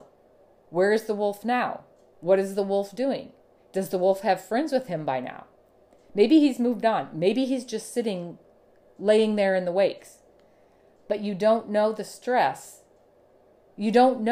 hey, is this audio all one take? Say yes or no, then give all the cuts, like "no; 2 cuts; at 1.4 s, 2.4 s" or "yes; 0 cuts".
yes; 0 cuts